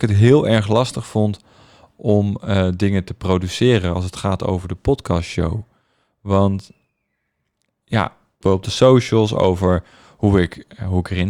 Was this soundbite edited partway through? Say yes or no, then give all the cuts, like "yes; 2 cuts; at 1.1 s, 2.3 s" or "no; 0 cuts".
yes; 1 cut; at 8.4 s